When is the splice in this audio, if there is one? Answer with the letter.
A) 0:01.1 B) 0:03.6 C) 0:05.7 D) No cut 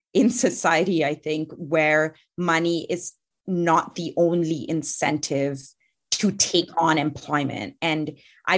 D